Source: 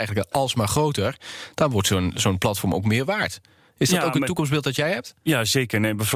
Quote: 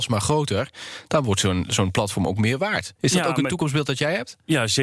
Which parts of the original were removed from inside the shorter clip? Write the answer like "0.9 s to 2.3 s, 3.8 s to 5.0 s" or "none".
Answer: 3.4 s to 3.7 s